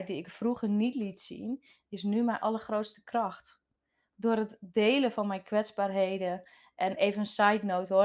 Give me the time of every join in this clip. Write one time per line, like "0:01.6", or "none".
none